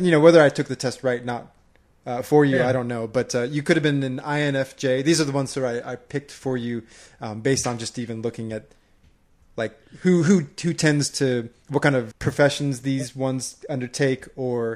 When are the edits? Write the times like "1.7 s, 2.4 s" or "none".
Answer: 12.1 s